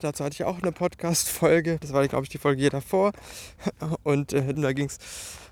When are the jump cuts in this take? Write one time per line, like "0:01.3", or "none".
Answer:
0:01.8
0:04.5